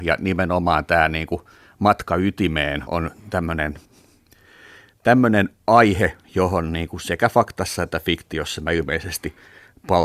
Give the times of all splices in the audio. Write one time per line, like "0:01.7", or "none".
0:02.9
0:06.2

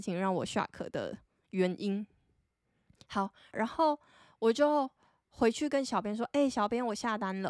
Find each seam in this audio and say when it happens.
0:03.5

